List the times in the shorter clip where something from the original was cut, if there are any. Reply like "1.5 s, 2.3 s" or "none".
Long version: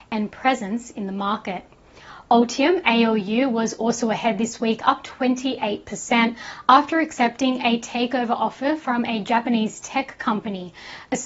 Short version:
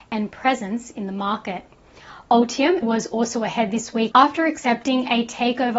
2.8 s, 4.1 s